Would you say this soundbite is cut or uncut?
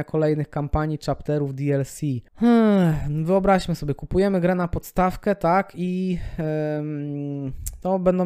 cut